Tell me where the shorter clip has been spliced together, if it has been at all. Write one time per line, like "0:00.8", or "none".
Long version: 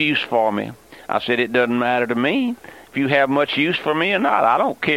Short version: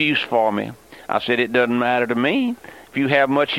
none